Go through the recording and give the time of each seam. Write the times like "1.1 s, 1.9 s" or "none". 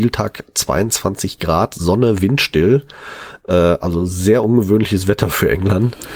none